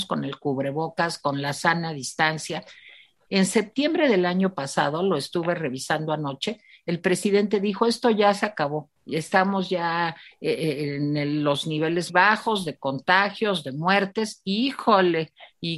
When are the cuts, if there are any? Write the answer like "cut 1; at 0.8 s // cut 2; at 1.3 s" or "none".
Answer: cut 1; at 3.3 s // cut 2; at 9.0 s // cut 3; at 12.1 s